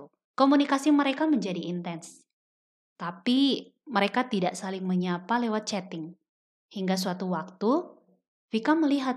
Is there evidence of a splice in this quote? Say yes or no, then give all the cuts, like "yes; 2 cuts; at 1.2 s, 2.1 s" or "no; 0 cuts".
no; 0 cuts